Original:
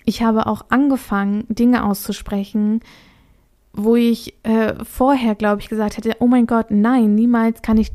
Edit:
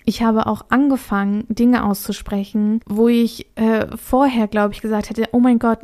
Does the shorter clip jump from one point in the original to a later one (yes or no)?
yes